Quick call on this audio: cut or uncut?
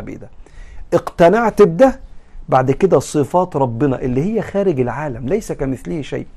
uncut